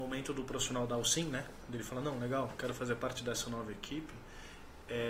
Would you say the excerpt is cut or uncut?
uncut